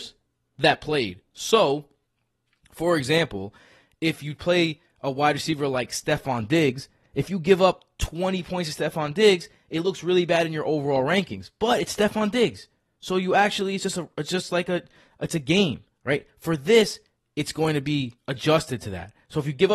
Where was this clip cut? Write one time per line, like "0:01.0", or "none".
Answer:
none